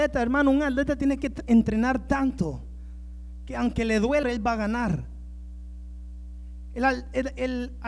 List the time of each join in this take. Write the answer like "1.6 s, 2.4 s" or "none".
4.2 s